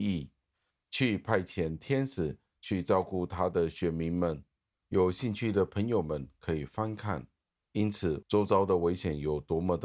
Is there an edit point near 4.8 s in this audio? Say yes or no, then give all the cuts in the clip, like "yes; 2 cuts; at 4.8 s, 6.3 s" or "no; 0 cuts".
yes; 2 cuts; at 4.8 s, 8.2 s